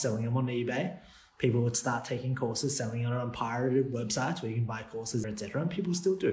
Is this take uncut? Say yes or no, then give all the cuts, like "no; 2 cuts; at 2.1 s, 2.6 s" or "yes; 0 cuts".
no; 1 cut; at 5.2 s